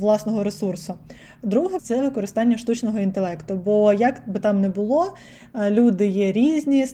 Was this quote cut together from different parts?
yes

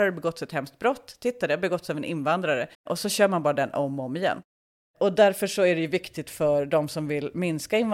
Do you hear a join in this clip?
yes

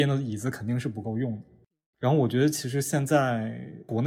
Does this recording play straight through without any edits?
yes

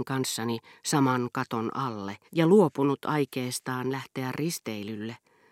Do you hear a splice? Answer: yes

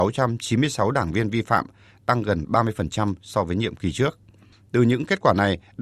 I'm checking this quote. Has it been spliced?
no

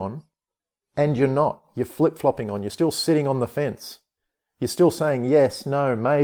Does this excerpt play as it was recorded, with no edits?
yes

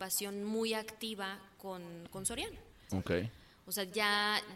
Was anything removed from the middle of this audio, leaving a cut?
yes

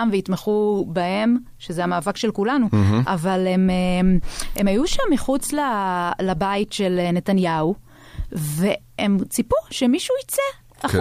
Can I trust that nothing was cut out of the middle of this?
yes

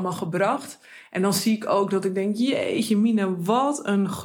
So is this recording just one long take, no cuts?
yes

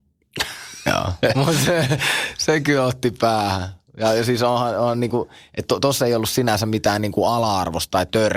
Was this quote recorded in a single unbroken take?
yes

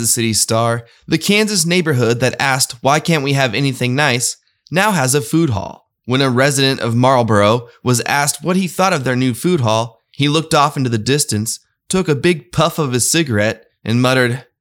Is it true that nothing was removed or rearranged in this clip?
yes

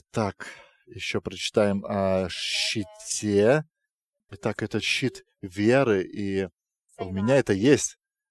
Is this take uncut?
no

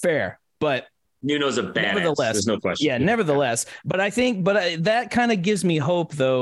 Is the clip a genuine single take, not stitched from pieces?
yes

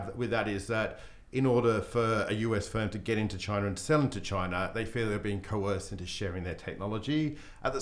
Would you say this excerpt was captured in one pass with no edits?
yes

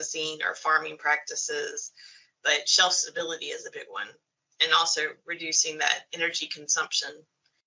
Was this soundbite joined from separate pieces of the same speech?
no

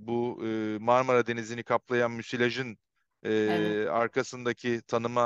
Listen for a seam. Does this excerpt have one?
no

